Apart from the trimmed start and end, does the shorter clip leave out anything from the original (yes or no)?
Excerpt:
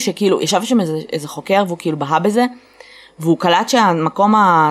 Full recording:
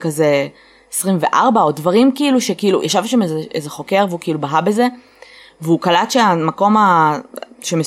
no